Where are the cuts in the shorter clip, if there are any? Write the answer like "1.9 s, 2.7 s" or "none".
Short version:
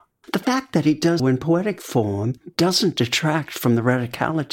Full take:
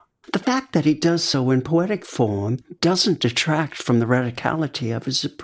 1.2 s